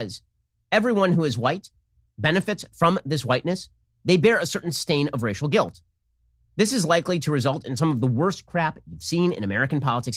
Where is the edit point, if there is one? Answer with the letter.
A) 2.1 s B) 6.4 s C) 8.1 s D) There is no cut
D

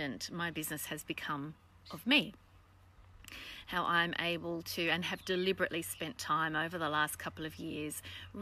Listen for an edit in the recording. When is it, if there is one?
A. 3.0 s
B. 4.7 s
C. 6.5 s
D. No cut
D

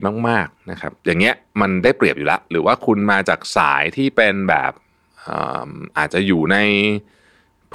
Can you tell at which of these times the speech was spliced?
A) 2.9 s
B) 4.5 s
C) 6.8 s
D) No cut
D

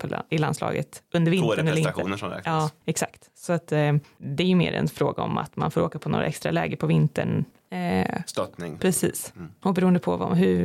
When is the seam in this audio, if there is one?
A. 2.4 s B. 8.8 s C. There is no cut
B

